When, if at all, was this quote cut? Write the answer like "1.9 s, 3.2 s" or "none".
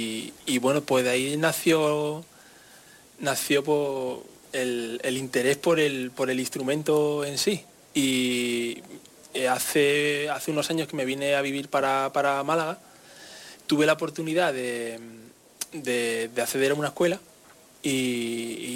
4.4 s